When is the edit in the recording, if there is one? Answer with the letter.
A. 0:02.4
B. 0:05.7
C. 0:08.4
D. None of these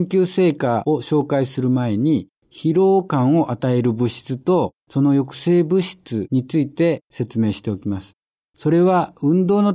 C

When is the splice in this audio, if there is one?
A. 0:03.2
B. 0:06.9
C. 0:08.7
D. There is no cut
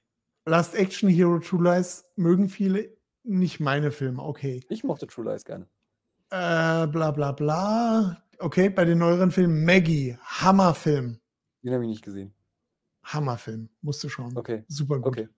D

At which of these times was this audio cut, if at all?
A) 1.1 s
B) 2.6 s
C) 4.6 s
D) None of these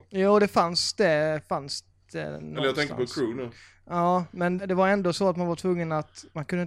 C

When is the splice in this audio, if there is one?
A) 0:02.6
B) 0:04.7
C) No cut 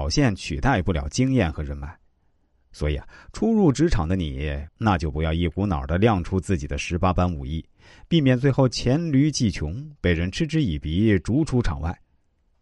B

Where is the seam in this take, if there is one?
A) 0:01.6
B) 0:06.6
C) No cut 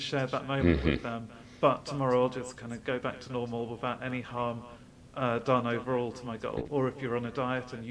B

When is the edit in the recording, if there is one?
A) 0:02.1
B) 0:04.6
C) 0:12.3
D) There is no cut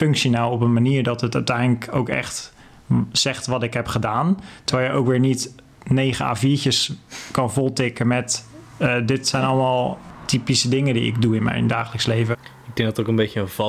C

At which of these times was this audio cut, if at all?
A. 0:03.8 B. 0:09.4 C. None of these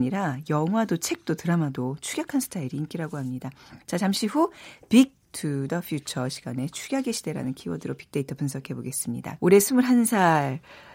B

